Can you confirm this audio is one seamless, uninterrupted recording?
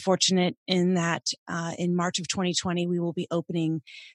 yes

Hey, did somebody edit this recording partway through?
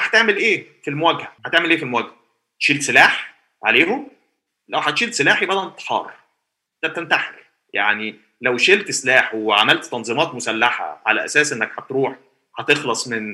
yes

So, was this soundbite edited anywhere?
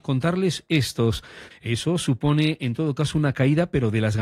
yes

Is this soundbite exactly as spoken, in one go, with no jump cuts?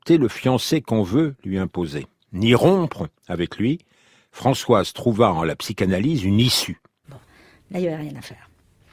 no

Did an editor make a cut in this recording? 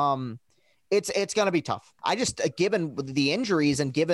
yes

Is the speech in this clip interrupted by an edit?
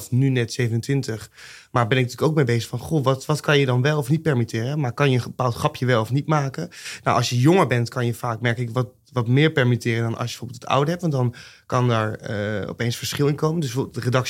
no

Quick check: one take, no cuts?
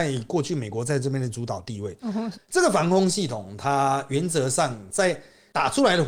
no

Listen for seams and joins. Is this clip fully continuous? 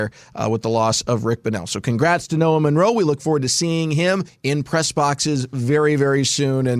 yes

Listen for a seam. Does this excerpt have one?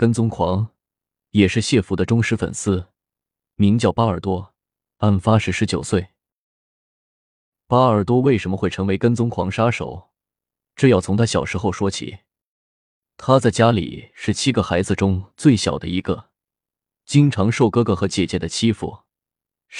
no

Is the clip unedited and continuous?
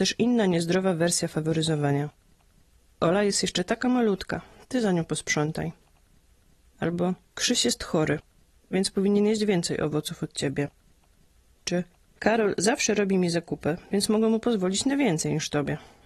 yes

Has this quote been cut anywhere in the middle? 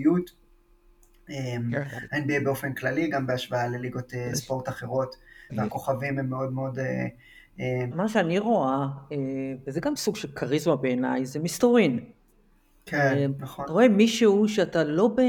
yes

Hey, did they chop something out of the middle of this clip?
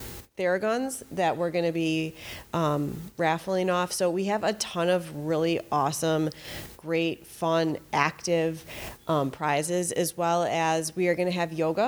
no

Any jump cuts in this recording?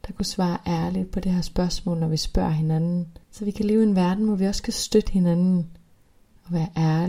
yes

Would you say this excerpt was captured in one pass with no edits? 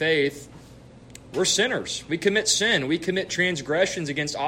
yes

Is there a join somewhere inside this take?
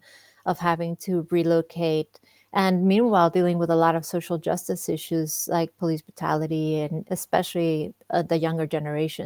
yes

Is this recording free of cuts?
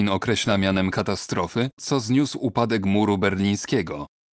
no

